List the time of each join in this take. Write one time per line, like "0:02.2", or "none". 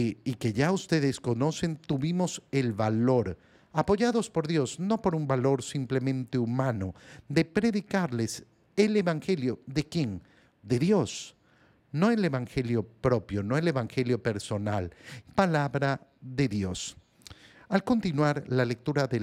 0:15.2